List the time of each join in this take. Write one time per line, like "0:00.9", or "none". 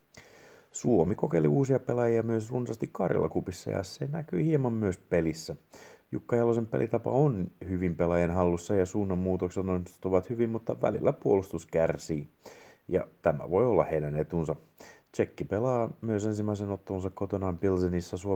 0:12.7